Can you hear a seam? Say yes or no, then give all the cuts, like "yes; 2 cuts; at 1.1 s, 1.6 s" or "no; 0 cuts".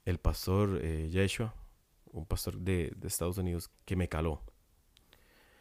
yes; 1 cut; at 3.7 s